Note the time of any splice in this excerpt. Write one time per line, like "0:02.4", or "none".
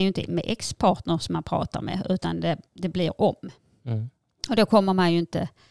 none